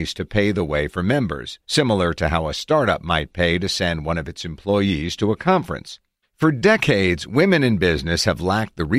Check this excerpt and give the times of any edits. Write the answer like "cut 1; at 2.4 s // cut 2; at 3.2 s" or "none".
cut 1; at 6.2 s